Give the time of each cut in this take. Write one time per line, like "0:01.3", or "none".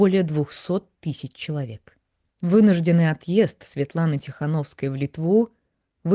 0:02.3